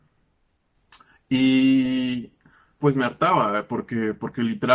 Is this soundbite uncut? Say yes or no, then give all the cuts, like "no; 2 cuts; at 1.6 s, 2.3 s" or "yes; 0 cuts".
no; 1 cut; at 2.8 s